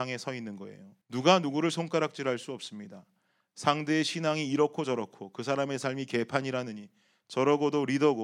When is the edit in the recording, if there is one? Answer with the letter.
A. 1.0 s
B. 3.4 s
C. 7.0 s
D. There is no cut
A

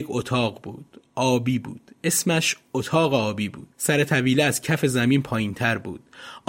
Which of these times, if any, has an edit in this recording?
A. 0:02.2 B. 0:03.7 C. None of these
B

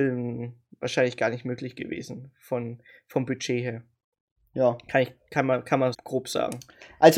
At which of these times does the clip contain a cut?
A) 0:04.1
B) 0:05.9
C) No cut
B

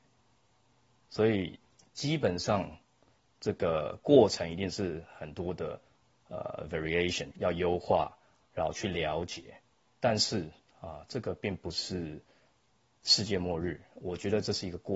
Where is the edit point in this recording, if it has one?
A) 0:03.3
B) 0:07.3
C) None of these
B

